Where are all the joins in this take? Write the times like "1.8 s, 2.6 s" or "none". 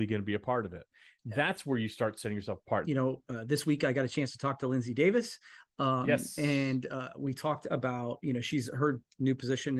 2.8 s